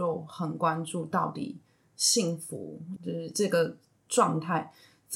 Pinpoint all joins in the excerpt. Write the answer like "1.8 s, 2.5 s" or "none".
3.0 s